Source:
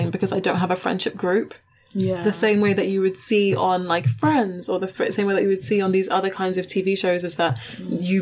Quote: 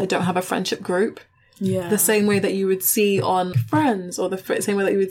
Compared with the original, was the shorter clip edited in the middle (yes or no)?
yes